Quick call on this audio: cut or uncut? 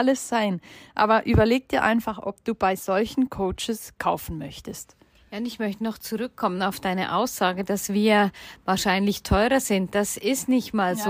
uncut